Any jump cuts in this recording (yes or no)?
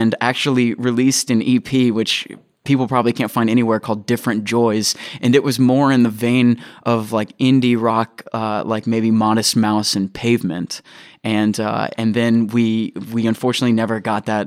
no